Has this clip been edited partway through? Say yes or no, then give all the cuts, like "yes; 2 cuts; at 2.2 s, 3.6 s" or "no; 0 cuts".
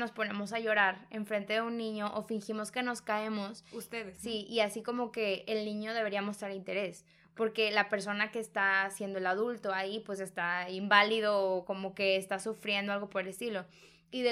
yes; 1 cut; at 4.2 s